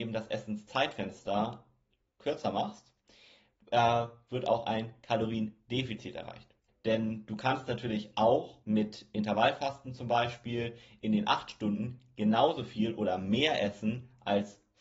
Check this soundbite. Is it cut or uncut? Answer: cut